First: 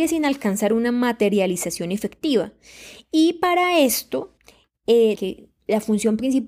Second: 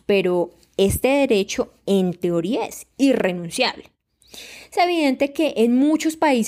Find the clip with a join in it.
first; 1 cut; at 5.2 s

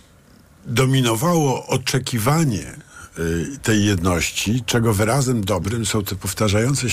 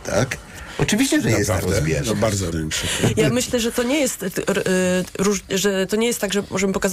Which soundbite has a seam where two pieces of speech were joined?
second; 1 cut; at 2.5 s

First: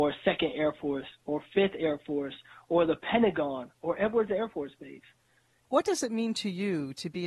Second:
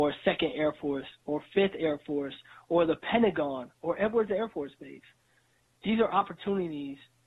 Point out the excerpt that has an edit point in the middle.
first; 1 cut; at 5.6 s

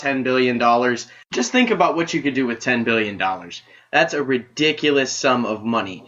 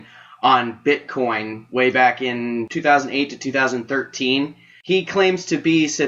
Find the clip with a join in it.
first; 1 cut; at 3.8 s

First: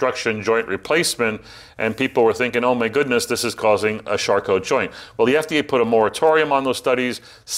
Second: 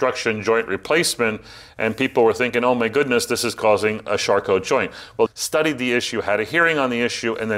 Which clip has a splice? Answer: second; 1 cut; at 5.3 s

